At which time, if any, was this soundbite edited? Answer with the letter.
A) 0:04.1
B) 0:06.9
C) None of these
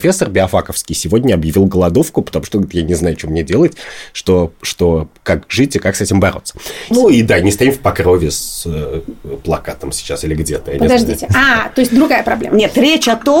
B